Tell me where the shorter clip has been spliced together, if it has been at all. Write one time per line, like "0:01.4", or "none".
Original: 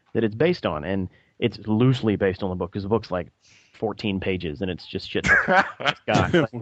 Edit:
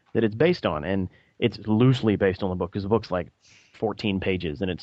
none